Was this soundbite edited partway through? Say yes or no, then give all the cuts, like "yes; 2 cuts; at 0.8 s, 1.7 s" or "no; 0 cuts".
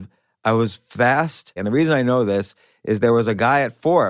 yes; 1 cut; at 1.6 s